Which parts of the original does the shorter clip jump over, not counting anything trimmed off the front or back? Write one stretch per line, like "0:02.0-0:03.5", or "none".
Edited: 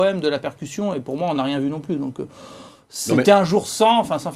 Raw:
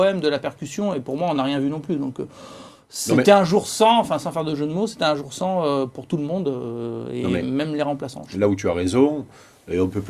none